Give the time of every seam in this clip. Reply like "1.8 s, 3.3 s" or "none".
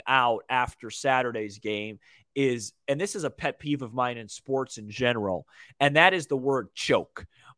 none